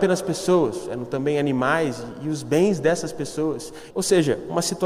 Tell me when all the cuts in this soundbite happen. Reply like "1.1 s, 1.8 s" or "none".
3.9 s